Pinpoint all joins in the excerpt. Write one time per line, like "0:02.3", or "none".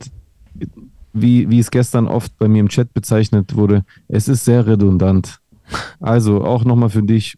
0:01.1
0:05.9